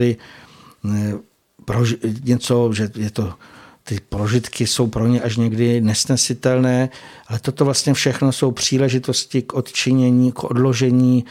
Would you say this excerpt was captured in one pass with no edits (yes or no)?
yes